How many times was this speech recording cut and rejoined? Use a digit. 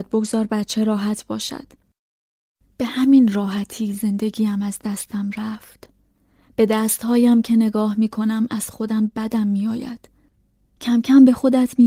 0